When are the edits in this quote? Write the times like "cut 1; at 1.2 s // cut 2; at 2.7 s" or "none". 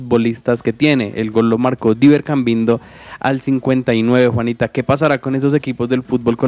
none